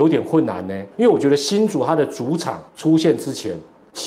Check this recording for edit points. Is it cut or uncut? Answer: cut